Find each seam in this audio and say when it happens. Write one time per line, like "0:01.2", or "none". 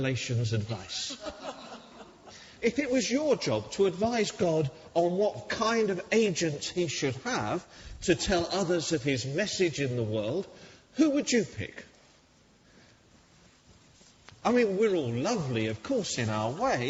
0:02.6
0:14.4